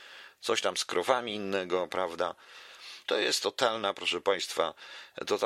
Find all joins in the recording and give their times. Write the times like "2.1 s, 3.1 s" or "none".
3.1 s